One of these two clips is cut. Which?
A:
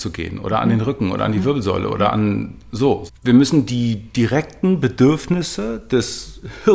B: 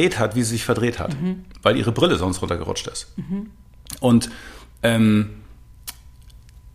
A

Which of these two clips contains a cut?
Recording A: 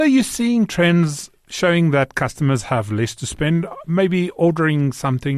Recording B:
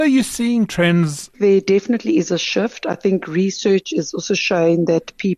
B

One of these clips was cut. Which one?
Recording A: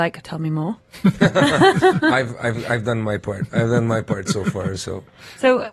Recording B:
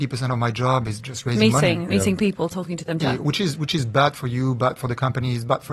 B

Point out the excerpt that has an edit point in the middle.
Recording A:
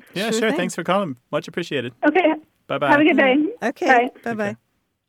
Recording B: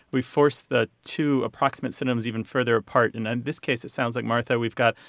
A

